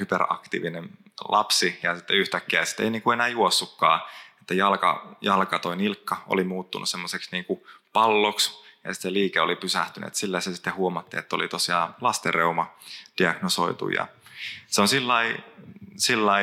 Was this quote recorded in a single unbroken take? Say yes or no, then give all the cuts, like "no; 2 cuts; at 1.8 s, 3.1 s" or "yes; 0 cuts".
yes; 0 cuts